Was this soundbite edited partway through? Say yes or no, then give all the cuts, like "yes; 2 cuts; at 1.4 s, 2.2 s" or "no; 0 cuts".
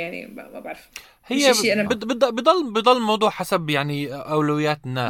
yes; 1 cut; at 1.9 s